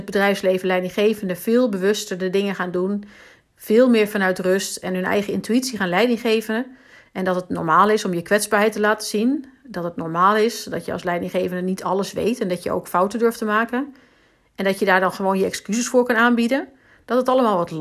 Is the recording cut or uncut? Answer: uncut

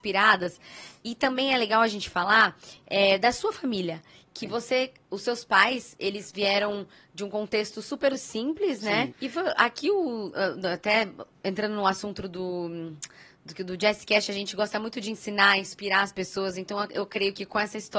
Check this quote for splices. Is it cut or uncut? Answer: cut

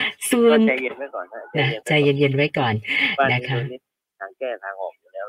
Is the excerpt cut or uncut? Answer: uncut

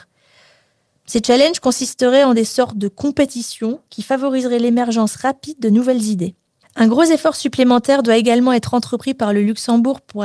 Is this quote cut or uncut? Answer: cut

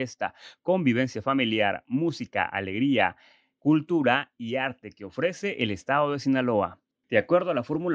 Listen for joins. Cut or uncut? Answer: cut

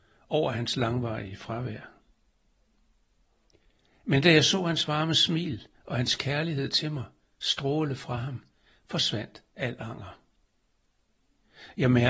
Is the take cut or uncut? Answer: uncut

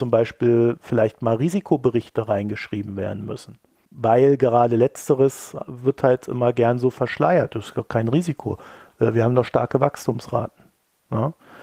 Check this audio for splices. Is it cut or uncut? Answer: uncut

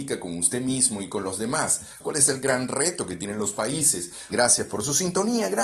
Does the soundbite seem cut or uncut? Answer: cut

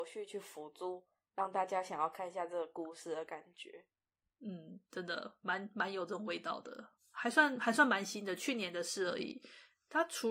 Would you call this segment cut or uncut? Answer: cut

